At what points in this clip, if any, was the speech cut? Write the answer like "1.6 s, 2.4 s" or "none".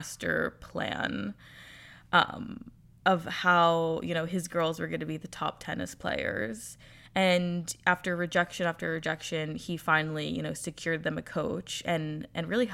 none